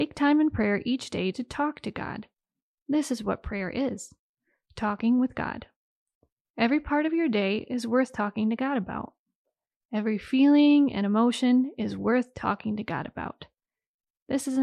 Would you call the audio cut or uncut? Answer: uncut